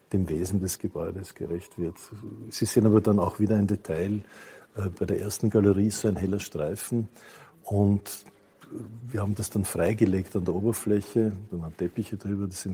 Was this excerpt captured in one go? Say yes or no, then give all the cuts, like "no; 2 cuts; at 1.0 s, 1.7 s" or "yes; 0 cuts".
yes; 0 cuts